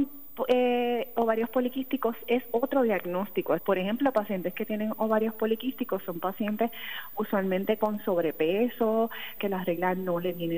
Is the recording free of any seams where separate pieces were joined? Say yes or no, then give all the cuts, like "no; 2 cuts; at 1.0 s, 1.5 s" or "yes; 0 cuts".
no; 2 cuts; at 3.6 s, 9.4 s